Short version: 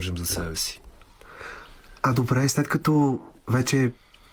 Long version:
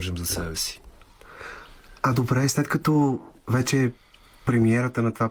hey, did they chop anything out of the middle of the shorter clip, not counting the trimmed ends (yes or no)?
no